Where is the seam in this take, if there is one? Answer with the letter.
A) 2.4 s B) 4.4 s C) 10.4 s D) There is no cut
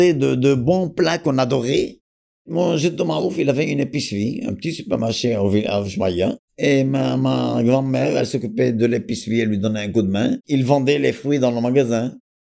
C